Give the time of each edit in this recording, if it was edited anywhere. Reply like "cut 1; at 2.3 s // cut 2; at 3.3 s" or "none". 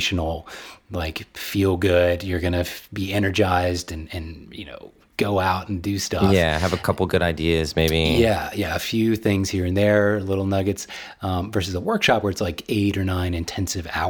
none